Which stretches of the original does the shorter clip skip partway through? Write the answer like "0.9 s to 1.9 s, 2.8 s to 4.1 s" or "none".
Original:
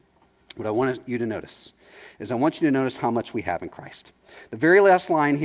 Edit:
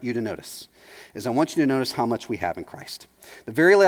none